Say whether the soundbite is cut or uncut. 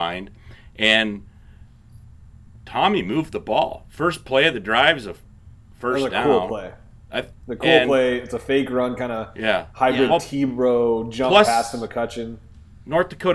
uncut